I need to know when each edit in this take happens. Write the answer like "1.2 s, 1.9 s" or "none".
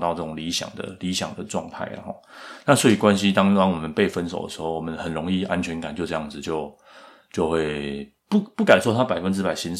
8.2 s